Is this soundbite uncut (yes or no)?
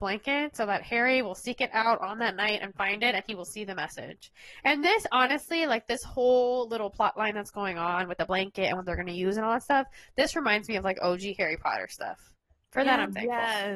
yes